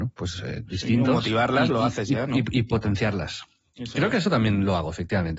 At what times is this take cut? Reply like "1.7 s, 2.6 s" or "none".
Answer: none